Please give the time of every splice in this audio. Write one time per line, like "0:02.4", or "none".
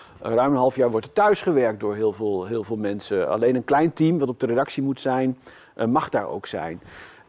none